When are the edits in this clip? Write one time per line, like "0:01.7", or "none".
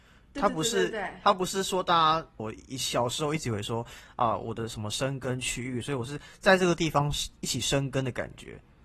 0:02.4
0:05.8